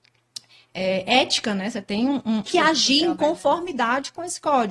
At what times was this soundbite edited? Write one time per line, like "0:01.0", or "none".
0:02.5

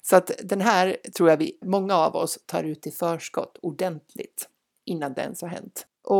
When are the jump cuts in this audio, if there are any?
0:01.6

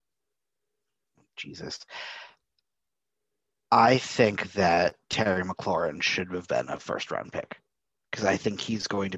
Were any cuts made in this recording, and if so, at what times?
none

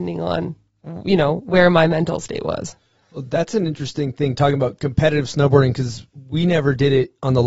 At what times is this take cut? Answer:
none

